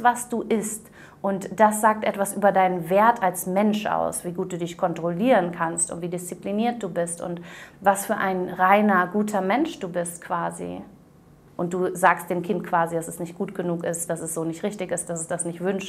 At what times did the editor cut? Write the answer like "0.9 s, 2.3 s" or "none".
11.5 s, 14.1 s